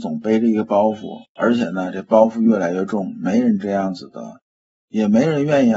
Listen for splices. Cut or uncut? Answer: uncut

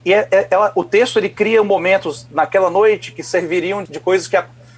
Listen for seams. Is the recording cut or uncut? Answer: cut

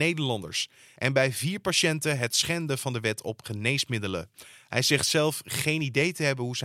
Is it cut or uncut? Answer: uncut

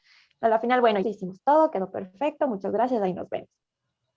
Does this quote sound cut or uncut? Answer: cut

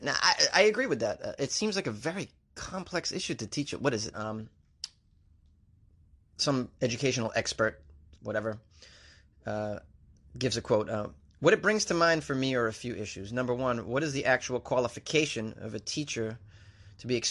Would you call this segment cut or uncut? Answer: cut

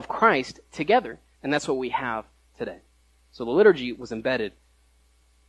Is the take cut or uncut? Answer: cut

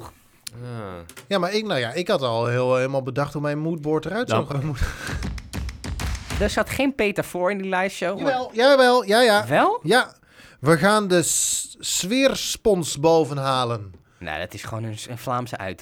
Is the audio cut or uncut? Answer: cut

